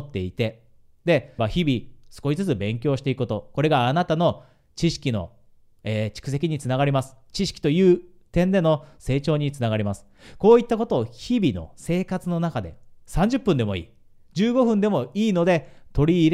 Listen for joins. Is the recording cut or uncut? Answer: cut